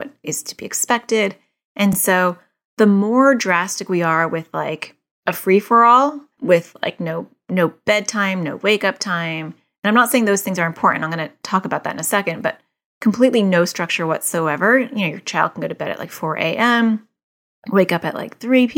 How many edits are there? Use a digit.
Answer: 0